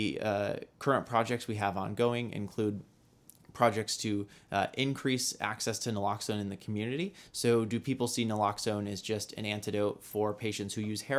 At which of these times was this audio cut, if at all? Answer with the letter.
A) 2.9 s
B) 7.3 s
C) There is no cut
B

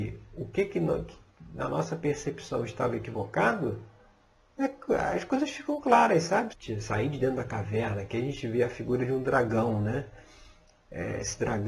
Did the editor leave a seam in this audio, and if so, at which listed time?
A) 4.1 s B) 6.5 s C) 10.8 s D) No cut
B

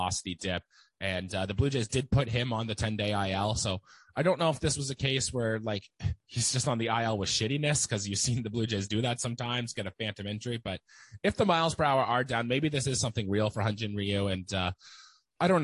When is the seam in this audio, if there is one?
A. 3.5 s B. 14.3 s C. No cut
C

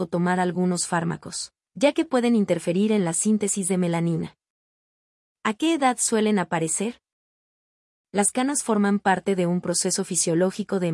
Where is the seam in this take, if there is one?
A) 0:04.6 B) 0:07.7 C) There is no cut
C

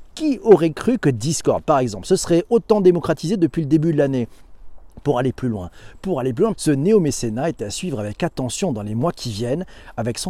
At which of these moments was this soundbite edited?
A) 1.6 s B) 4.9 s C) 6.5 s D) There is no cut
C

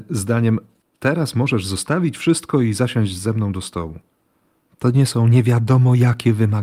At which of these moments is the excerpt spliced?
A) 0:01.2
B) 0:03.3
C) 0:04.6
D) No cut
C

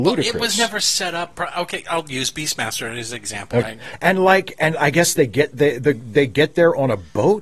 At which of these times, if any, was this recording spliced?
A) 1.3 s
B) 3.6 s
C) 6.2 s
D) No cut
B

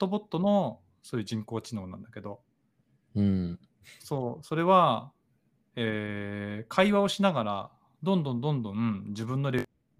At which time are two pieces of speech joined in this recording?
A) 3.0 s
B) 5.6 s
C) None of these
C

